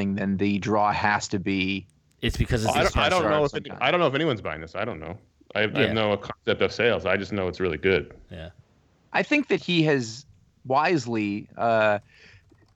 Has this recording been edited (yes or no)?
no